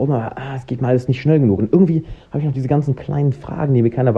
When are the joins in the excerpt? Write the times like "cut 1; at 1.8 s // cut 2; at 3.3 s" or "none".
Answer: none